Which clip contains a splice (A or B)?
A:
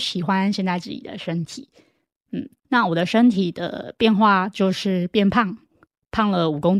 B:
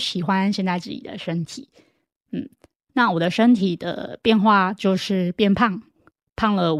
A